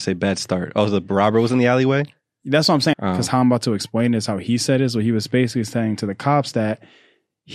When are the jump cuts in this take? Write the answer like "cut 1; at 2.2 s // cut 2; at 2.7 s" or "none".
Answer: cut 1; at 2.9 s